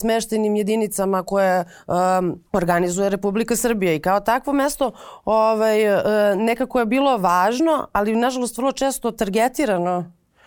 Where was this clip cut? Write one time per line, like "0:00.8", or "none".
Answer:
0:02.5